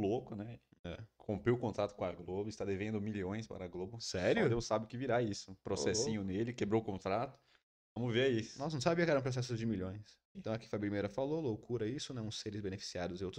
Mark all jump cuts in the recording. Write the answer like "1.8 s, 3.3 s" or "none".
10.3 s